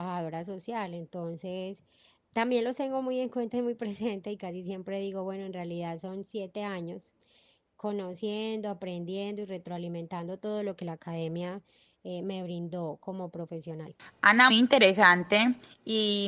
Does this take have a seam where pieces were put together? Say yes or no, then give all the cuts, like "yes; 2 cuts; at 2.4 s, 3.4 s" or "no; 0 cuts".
yes; 1 cut; at 14.5 s